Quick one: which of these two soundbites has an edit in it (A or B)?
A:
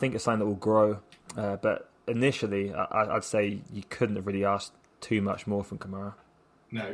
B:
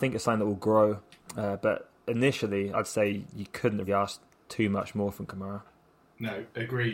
B